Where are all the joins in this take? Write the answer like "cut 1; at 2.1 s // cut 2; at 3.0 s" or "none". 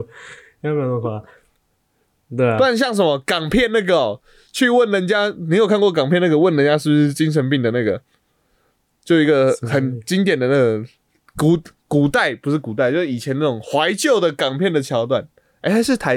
none